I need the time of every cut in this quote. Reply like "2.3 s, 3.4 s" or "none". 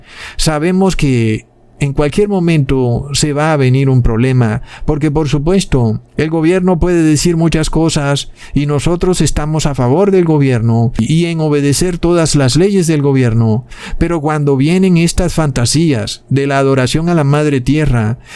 6.1 s